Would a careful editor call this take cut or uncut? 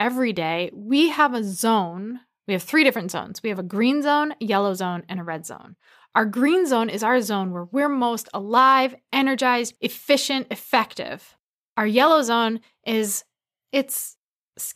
cut